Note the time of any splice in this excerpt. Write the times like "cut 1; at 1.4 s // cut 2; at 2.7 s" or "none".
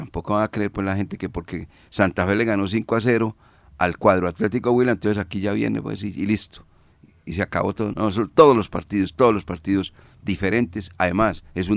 cut 1; at 7.9 s